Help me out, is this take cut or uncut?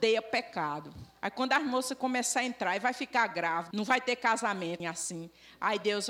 cut